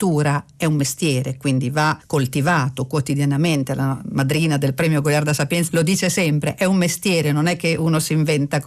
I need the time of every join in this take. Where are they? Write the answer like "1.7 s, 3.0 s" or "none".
5.7 s